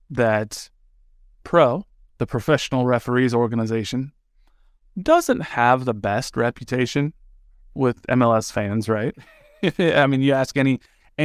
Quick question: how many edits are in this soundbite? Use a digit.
1